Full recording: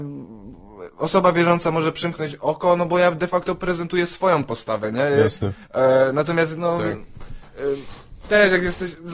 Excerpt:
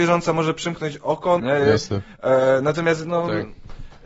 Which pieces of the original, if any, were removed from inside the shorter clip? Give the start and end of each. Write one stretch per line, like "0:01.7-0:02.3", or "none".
0:02.8-0:04.9